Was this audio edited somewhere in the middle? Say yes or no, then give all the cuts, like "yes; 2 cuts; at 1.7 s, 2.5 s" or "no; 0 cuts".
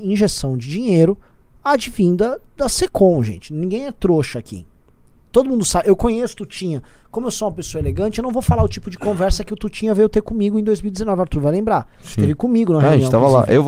no; 0 cuts